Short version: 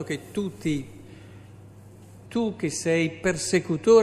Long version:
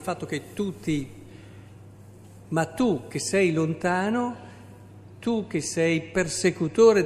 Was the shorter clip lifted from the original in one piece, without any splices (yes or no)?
no